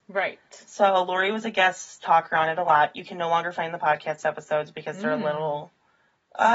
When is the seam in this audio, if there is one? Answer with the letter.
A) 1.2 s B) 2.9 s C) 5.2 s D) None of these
D